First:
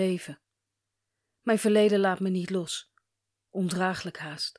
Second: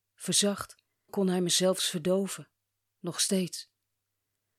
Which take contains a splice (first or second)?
second